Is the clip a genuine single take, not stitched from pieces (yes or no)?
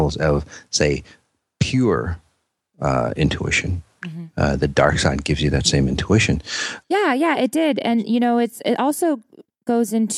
no